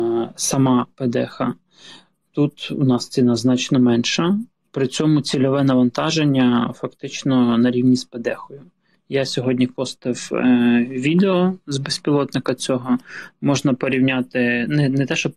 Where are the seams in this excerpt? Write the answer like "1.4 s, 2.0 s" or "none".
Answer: none